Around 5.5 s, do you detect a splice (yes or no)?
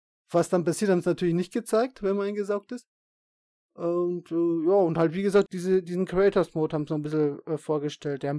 yes